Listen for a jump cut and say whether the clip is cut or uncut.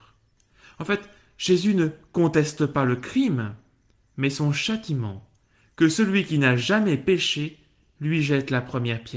uncut